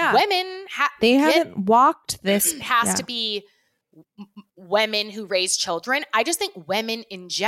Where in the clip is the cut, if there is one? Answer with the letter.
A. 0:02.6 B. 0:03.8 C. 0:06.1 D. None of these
A